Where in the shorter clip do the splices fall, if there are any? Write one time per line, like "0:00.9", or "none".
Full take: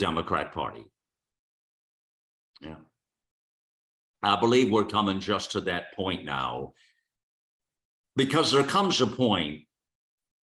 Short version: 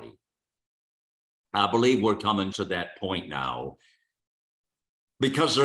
0:01.3
0:02.5